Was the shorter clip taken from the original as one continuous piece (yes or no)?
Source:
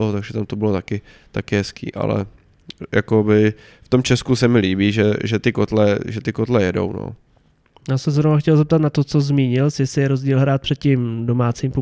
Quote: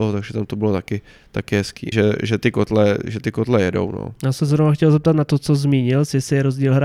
no